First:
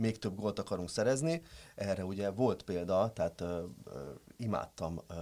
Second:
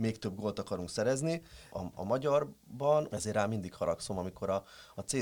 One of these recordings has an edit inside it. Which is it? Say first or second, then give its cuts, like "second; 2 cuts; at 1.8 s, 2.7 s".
second; 2 cuts; at 1.7 s, 3.1 s